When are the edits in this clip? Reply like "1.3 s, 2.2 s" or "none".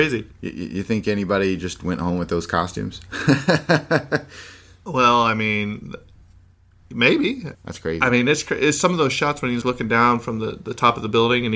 7.5 s, 9.6 s